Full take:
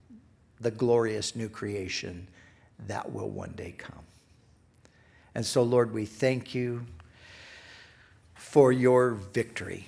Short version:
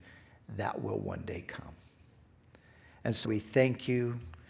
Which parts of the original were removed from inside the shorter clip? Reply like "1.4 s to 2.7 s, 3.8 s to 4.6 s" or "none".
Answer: 5.5 s to 5.9 s